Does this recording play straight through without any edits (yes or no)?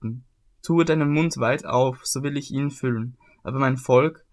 yes